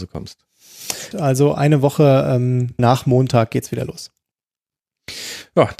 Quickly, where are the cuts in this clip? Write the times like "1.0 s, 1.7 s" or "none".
1.1 s, 2.8 s